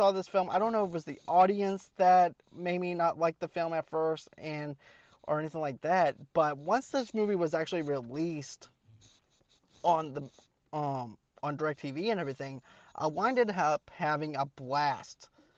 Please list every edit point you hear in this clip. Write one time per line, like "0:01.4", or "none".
none